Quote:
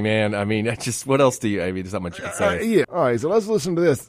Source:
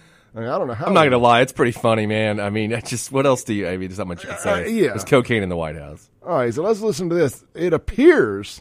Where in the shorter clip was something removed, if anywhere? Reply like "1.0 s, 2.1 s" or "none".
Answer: 2.8 s